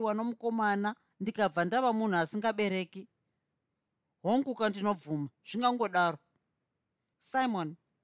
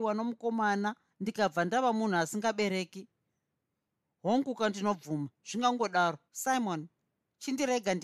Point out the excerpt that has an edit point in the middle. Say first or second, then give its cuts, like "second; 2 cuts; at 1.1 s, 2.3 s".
second; 1 cut; at 6.3 s